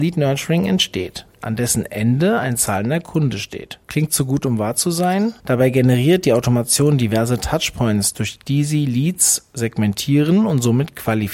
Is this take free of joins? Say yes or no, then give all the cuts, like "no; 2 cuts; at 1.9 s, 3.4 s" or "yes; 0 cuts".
no; 2 cuts; at 3.8 s, 5.4 s